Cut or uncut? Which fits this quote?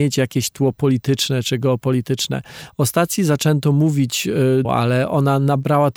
cut